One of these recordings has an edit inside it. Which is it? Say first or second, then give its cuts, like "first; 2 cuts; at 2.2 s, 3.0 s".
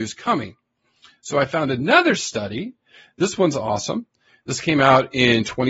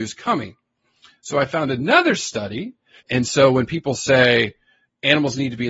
second; 1 cut; at 3.0 s